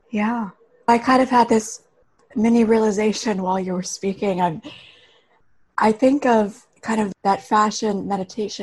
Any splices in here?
yes; 1 cut; at 6.7 s

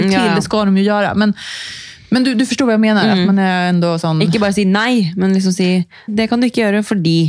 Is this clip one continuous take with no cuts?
no; 1 cut; at 6.1 s

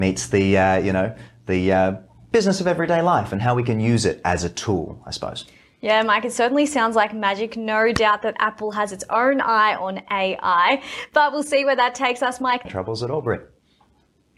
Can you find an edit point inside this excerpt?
yes; 1 cut; at 12.6 s

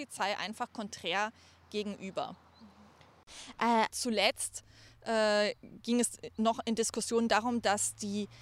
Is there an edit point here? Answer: yes; 1 cut; at 3.9 s

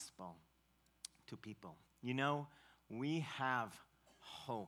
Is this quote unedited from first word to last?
yes; 0 cuts

